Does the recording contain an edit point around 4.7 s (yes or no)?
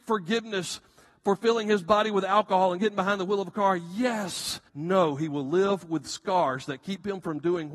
yes